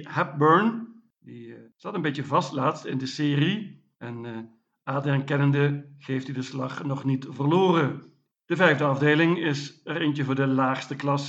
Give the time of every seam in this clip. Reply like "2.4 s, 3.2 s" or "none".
3.9 s, 8.3 s